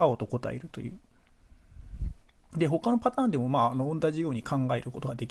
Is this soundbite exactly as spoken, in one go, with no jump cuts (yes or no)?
yes